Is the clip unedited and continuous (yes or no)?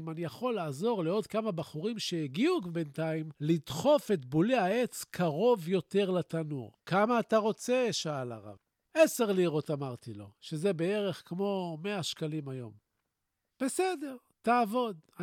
no